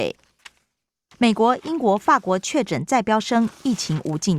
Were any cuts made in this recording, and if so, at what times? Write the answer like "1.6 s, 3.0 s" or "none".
1.1 s